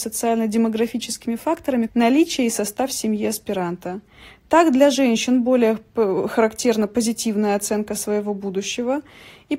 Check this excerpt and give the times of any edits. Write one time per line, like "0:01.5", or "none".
0:01.9